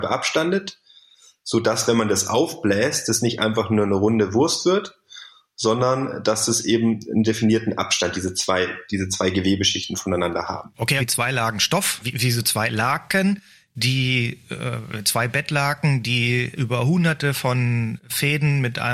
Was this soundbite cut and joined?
yes; 1 cut; at 11.0 s

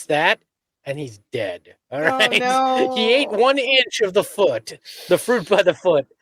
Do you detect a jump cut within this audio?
no; 0 cuts

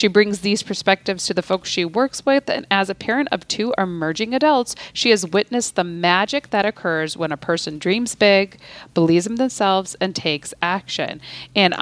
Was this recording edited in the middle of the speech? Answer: no; 0 cuts

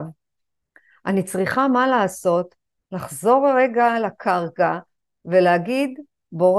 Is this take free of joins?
yes; 0 cuts

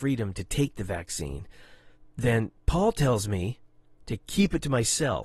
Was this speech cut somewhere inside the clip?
no; 0 cuts

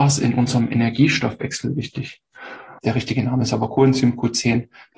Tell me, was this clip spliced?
yes; 1 cut; at 2.8 s

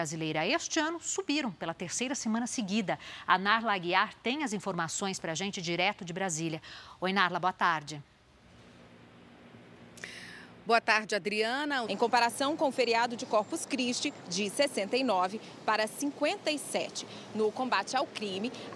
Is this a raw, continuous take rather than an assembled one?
no; 2 cuts; at 11.8 s, 14.2 s

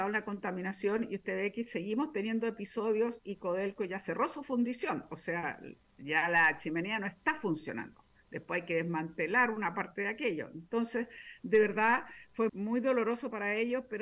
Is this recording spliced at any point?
yes; 1 cut; at 12.5 s

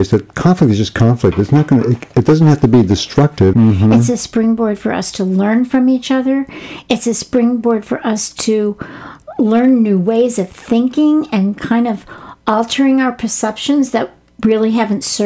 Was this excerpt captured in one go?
no; 1 cut; at 3.5 s

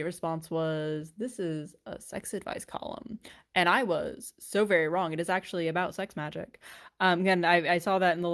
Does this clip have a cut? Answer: no; 0 cuts

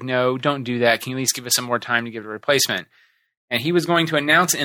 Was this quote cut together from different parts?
no; 0 cuts

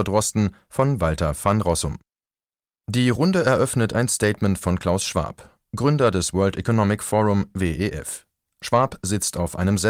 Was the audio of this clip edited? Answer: no; 0 cuts

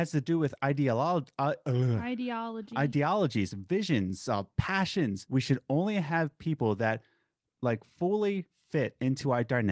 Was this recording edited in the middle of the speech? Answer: yes; 1 cut; at 5.3 s

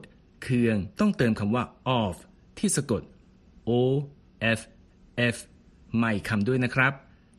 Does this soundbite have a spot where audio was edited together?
yes; 1 cut; at 0.9 s

